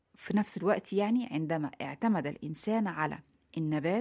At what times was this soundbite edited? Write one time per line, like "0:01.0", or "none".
none

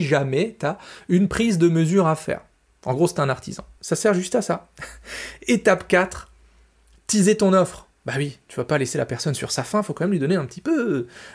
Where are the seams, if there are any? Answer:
0:03.8

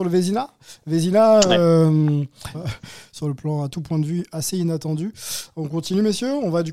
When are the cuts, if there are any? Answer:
0:02.5

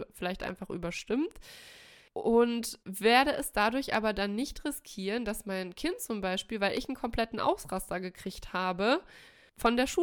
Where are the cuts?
none

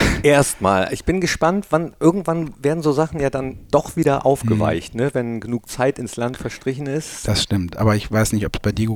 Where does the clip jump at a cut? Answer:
none

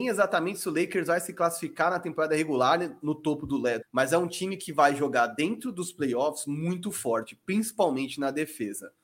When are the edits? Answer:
0:03.8

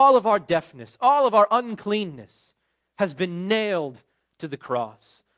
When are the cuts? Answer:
0:01.0

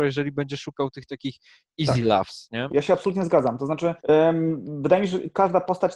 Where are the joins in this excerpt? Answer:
0:02.7
0:04.0

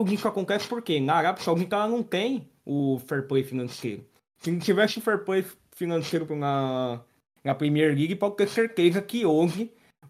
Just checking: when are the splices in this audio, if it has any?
0:06.3

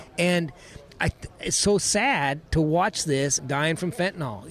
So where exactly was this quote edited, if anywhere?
0:03.4

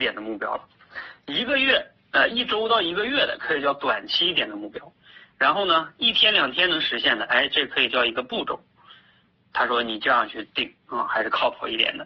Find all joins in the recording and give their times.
none

